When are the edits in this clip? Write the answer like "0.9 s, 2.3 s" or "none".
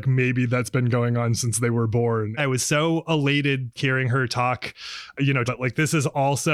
2.4 s, 3.8 s, 5.5 s